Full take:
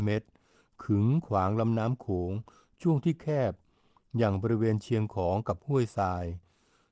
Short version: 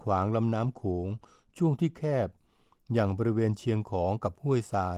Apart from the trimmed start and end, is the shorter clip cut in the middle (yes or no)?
no